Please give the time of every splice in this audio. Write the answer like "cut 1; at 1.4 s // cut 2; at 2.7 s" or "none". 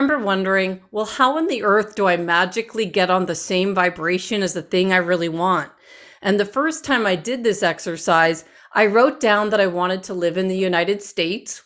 none